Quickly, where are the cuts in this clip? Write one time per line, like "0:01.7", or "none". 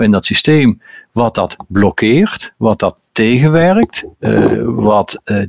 none